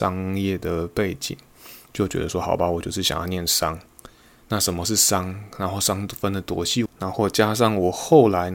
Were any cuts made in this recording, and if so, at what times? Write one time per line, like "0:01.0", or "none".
0:06.9